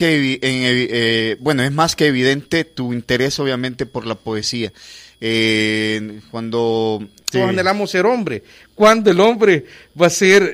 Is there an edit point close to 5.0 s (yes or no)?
no